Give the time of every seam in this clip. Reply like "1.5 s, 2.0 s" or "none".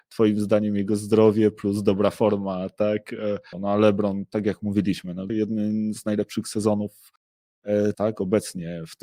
3.5 s, 5.3 s, 7.9 s